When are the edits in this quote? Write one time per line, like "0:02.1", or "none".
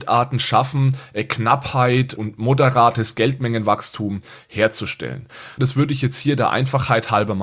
0:02.1
0:05.6

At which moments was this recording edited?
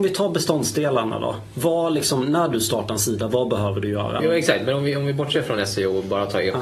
0:04.2

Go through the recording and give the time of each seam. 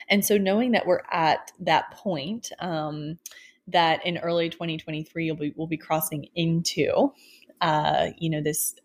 none

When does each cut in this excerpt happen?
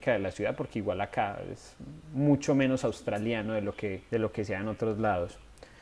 0:04.1

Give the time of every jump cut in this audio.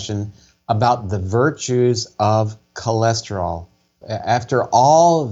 0:04.0

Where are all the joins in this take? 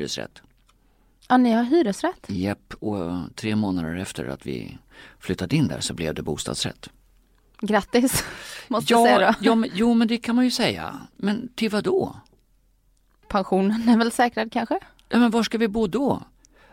none

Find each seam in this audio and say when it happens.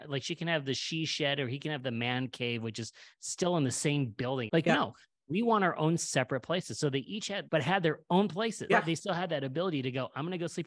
0:04.5
0:07.5
0:08.7

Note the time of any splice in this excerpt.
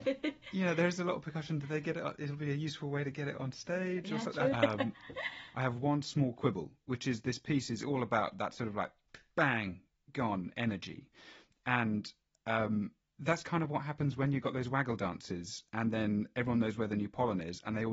0:04.5

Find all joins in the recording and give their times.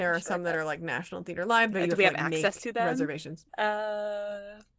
0:01.7
0:03.5

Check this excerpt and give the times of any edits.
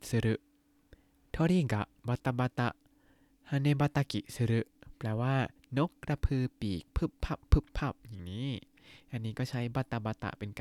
none

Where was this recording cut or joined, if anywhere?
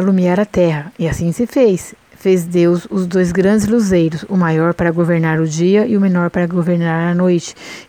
none

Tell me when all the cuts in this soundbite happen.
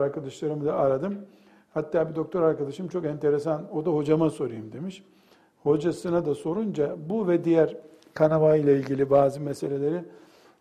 none

